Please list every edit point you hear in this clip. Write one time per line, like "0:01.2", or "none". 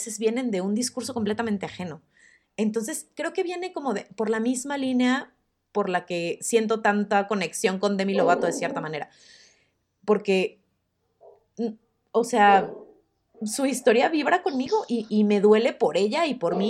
0:13.3
0:15.1